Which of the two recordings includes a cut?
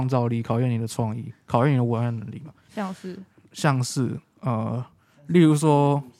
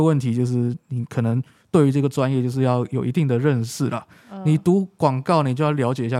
first; 1 cut; at 2.7 s

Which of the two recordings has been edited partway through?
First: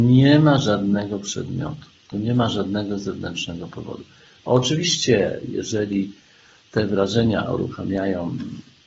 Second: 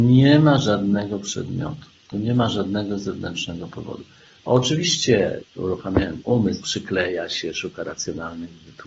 second; 2 cuts; at 5.4 s, 6.6 s

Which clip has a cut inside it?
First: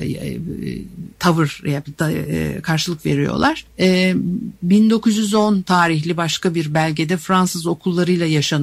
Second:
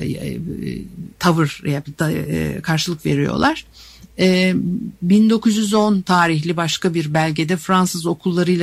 first; 1 cut; at 3.7 s

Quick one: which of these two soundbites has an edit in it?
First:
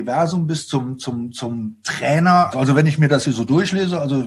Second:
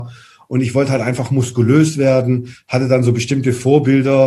first; 1 cut; at 2.5 s

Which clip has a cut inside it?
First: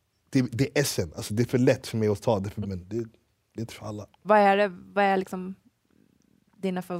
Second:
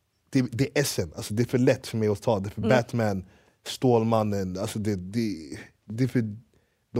first; 2 cuts; at 2.6 s, 4.2 s

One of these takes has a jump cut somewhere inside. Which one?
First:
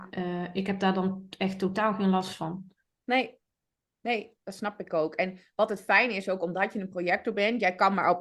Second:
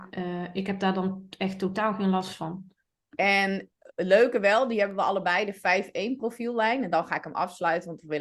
second; 1 cut; at 3.0 s

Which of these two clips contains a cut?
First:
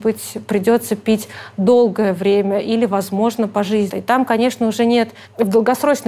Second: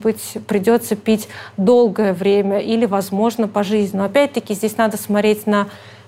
first; 1 cut; at 3.9 s

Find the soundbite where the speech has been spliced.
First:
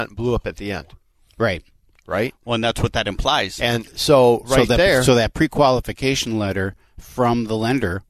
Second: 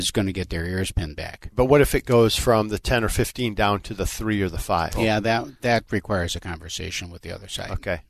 second; 1 cut; at 1.5 s

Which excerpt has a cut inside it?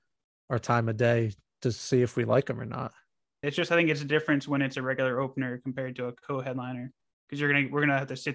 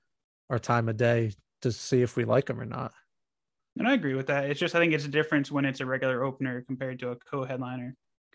first; 1 cut; at 3.4 s

